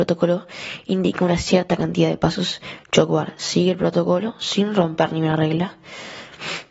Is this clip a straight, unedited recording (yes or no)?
yes